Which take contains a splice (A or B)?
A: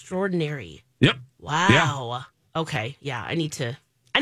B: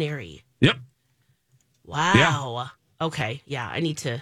A